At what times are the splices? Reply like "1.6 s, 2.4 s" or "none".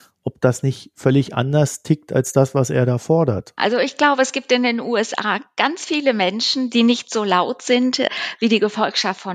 3.6 s, 6.7 s

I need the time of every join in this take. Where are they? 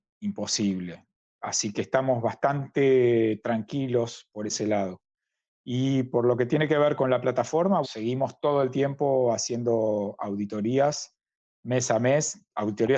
7.8 s

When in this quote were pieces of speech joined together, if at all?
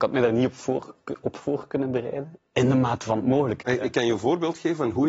2.4 s, 3.6 s

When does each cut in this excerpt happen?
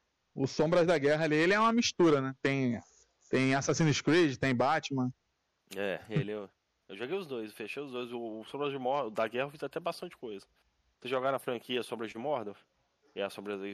11.0 s

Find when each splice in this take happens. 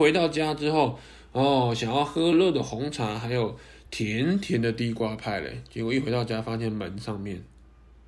2.3 s

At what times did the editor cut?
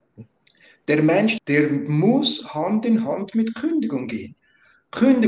1.4 s

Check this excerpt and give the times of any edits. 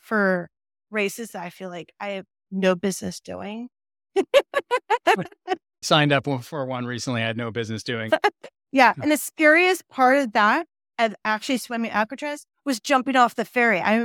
5.8 s, 8.1 s

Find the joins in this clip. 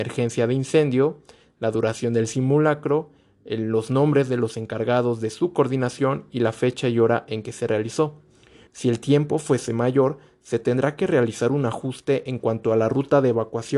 8.7 s

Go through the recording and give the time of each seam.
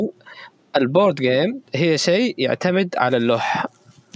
1.7 s

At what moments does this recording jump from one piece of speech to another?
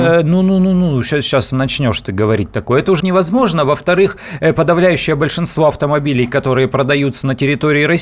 3.0 s

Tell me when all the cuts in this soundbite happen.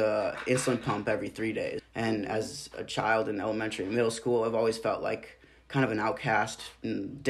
1.8 s

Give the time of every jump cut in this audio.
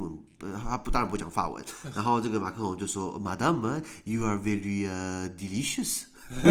none

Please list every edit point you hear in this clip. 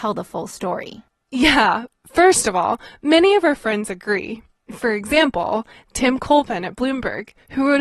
none

